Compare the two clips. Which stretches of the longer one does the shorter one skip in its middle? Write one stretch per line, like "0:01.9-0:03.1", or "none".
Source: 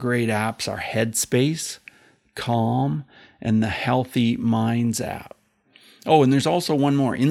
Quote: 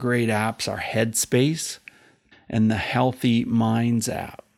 0:02.3-0:03.2